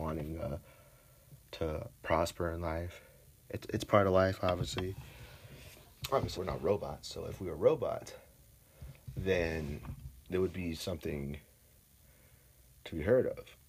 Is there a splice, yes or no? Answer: yes